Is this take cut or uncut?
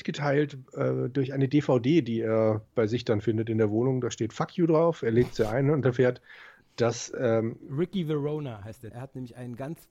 cut